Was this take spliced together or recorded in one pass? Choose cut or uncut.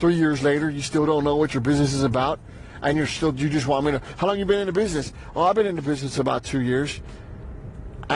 uncut